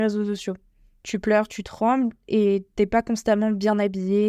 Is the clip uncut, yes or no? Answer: yes